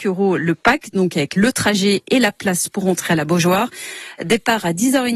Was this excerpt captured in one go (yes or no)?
yes